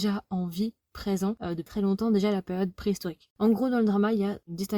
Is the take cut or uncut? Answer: cut